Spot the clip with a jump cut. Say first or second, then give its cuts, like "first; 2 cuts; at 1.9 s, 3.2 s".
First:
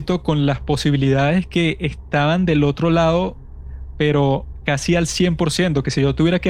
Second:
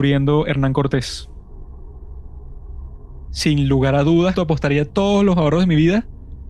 second; 2 cuts; at 3.3 s, 4.4 s